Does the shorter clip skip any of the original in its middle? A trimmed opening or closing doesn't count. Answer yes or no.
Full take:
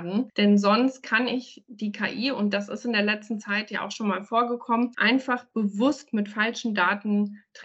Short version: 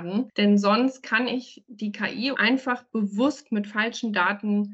yes